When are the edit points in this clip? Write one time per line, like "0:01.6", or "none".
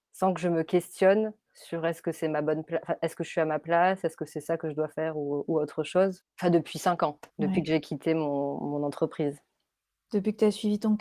0:06.2
0:07.3